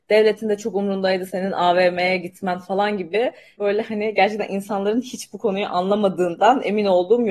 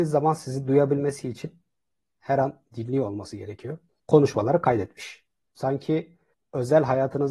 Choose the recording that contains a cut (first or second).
second